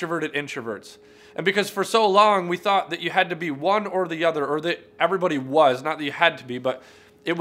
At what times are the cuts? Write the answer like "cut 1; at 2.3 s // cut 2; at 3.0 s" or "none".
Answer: none